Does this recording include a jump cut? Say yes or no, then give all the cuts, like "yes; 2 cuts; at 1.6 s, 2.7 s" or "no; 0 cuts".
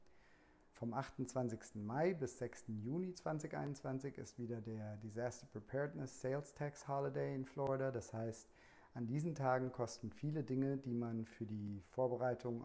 no; 0 cuts